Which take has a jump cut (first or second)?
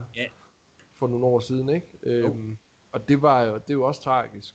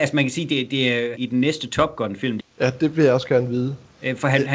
second